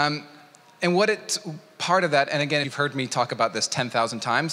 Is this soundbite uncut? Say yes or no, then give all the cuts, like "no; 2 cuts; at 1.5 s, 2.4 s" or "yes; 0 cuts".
no; 1 cut; at 2.6 s